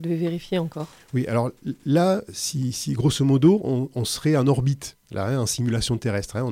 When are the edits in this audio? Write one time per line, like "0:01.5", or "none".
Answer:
none